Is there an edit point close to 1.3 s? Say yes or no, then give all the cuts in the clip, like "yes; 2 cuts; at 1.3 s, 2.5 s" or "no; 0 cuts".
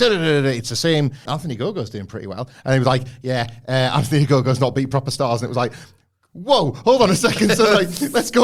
yes; 1 cut; at 1.3 s